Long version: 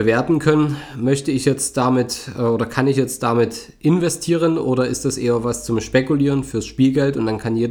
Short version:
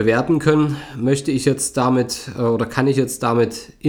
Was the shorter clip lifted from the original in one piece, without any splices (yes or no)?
yes